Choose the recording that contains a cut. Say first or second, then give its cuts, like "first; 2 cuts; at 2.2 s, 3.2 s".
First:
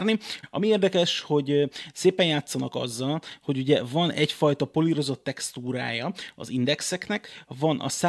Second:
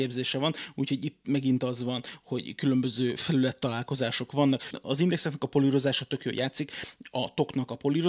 second; 1 cut; at 4.7 s